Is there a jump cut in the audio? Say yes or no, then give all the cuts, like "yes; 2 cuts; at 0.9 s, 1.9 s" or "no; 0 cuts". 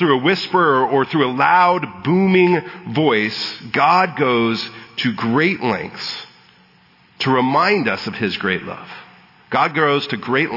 no; 0 cuts